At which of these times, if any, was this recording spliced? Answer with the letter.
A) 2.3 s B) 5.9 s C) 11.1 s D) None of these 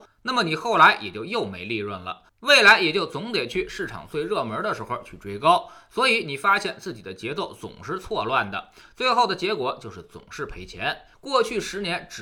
C